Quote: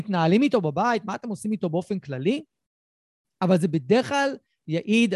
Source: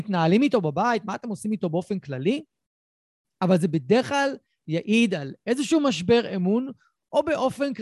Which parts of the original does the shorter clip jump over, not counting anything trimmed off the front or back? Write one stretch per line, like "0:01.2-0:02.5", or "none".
none